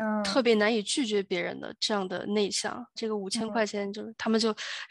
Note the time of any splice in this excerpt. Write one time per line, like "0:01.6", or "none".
0:03.0